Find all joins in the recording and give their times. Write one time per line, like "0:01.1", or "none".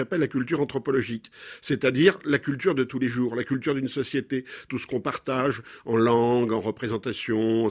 0:04.7